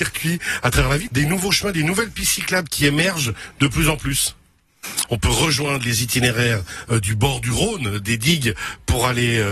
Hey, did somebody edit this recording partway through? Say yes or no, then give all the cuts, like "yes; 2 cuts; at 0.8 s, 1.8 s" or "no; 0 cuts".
yes; 2 cuts; at 1.1 s, 5.1 s